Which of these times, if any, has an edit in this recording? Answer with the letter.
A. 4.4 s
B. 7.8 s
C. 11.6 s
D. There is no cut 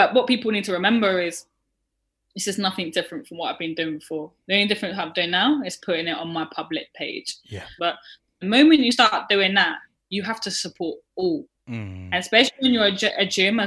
B